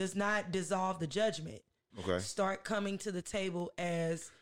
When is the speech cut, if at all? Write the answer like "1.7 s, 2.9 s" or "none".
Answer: 1.9 s